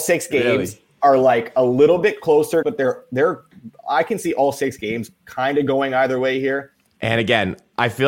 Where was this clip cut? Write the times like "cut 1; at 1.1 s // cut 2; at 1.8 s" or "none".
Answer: cut 1; at 2.6 s // cut 2; at 6.9 s